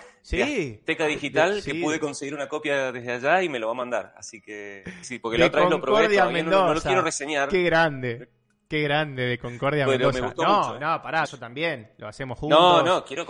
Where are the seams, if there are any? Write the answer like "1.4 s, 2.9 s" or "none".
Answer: 5.0 s, 11.2 s